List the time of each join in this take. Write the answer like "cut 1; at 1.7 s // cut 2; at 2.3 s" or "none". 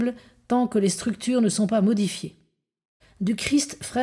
cut 1; at 3.0 s